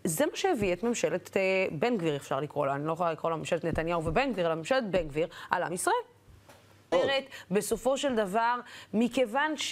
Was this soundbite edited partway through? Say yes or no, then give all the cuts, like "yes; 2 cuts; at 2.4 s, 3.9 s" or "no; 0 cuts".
yes; 1 cut; at 6.9 s